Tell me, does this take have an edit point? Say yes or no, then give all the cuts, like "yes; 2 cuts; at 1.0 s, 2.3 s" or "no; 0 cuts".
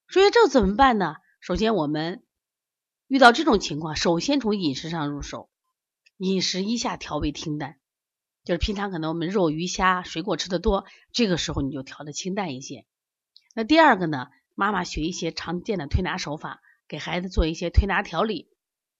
no; 0 cuts